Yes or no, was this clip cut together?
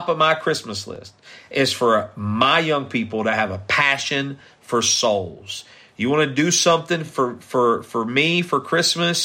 no